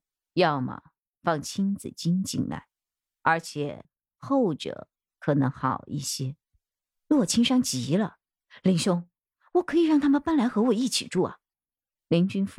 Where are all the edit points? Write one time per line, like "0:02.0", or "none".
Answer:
0:11.5

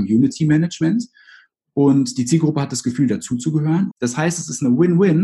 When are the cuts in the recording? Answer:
0:03.9

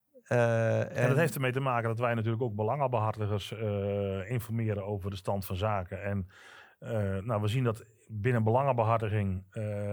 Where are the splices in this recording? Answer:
none

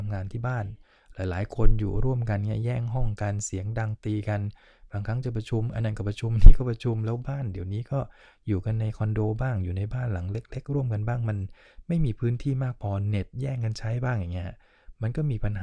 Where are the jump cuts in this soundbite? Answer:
none

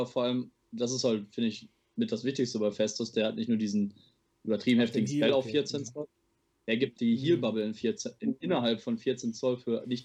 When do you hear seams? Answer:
0:06.9

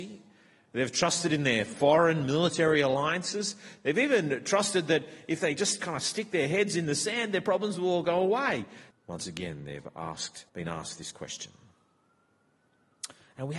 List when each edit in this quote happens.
0:08.9
0:10.5

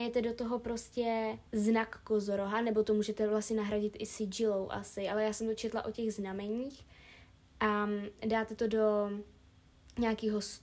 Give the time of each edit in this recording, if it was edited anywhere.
0:01.5

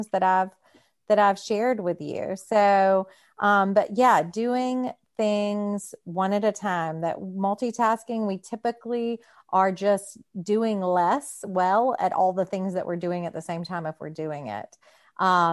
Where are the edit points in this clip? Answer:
0:10.3

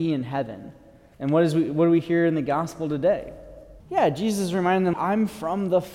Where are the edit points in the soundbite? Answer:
0:01.1
0:03.8
0:04.9

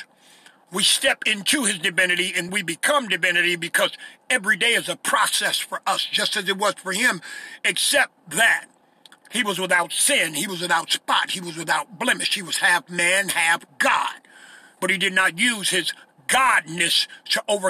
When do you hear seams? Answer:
0:02.5

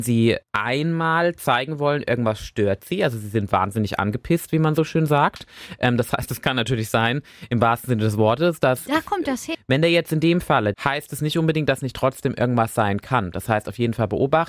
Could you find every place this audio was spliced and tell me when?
0:09.5
0:10.7

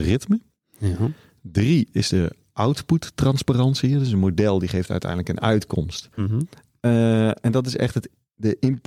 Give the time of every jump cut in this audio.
0:06.2

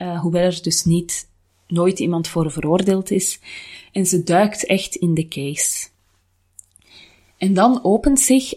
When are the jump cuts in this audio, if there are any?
none

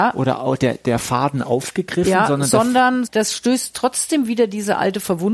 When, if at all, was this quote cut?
0:03.1

